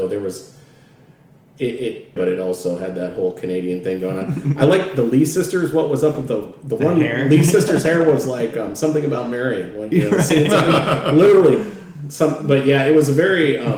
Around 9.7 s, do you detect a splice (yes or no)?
no